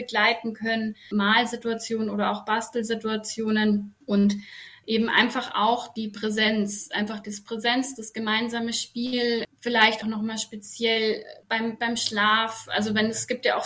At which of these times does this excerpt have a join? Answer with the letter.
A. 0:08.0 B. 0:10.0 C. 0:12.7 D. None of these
B